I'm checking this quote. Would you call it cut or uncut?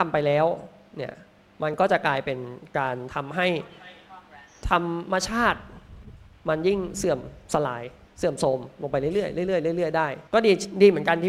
cut